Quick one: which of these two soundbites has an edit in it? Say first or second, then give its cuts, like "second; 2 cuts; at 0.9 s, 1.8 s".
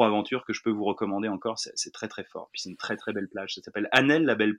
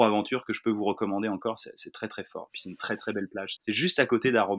second; 1 cut; at 3.6 s